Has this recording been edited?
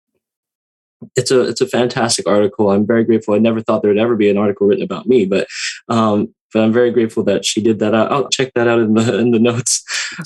yes; 1 cut; at 8.3 s

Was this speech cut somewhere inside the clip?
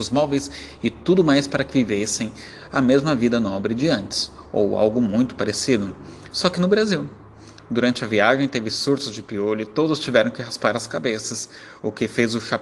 no; 0 cuts

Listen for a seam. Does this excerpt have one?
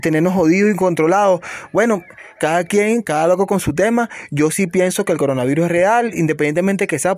no; 0 cuts

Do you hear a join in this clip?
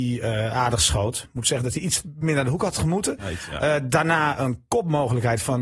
no; 0 cuts

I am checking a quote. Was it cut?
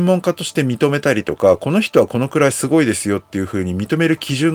no; 0 cuts

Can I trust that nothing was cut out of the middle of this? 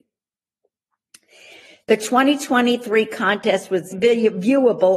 no; 1 cut; at 3.9 s

